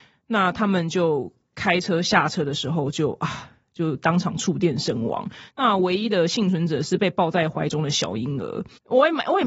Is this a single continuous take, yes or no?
yes